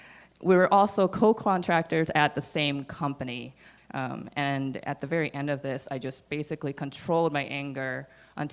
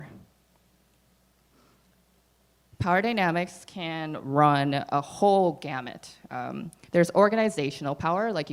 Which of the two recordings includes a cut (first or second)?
first